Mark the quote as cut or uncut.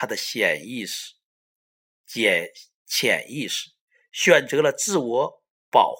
uncut